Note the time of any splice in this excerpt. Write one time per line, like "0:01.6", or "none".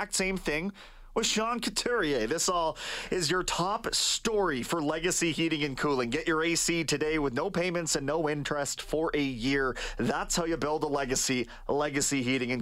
none

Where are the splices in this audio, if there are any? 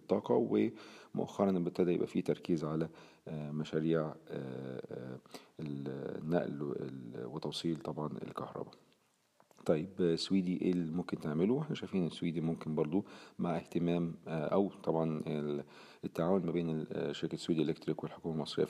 none

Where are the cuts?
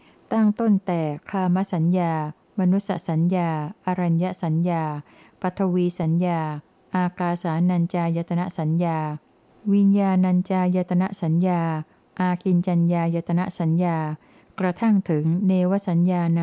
none

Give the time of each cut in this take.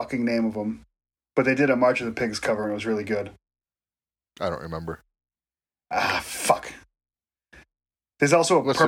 none

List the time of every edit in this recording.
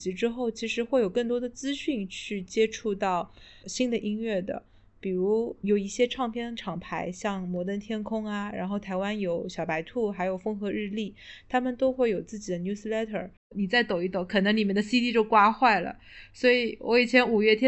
0:13.4

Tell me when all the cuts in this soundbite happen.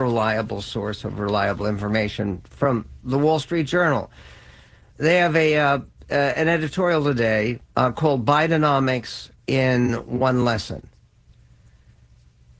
0:07.7
0:09.4

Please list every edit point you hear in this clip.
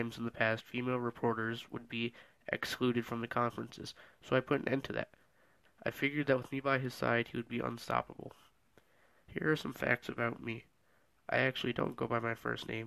0:05.6

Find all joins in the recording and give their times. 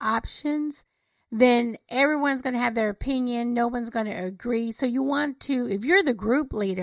none

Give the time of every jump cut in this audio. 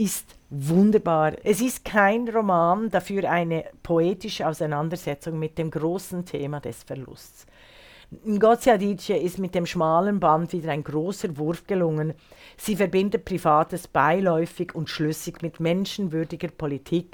0:01.4

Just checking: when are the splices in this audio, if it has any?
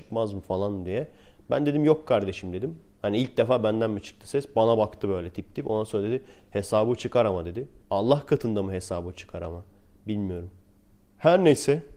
0:07.8

